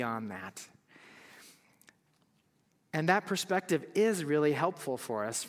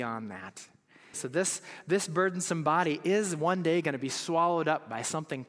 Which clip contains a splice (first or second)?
second